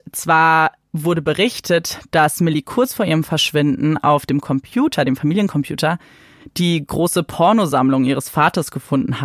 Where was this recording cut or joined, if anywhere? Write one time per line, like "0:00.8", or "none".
none